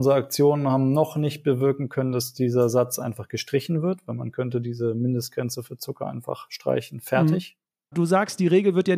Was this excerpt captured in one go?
no; 1 cut; at 7.9 s

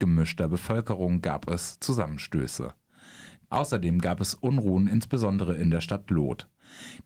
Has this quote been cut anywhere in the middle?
yes; 1 cut; at 3.5 s

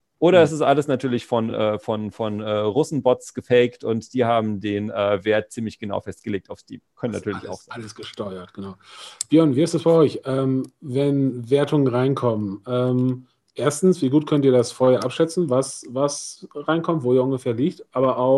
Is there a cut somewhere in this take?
no; 0 cuts

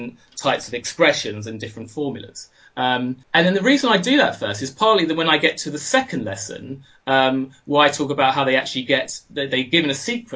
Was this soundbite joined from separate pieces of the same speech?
yes; 1 cut; at 3.2 s

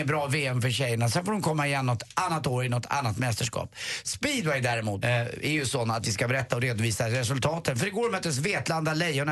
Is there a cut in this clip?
yes; 1 cut; at 5.0 s

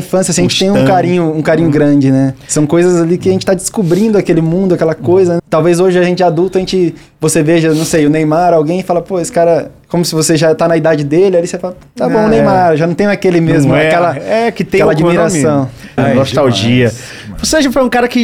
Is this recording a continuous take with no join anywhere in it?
no; 2 cuts; at 5.4 s, 16.0 s

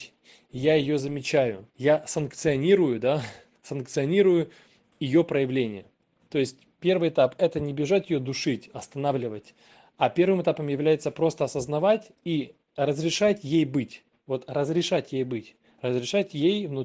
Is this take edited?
yes; 3 cuts; at 1.7 s, 3.5 s, 9.8 s

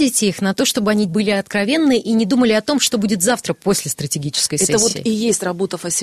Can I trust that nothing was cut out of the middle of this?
yes; 0 cuts

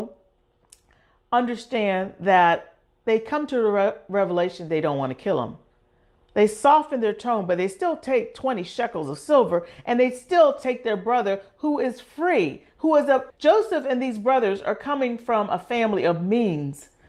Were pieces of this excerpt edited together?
yes; 1 cut; at 13.3 s

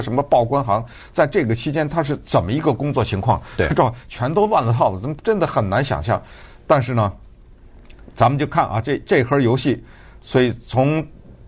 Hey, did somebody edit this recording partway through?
no; 0 cuts

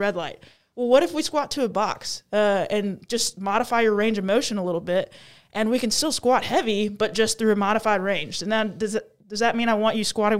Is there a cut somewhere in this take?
no; 0 cuts

